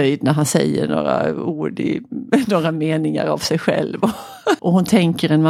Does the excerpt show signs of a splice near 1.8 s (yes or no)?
no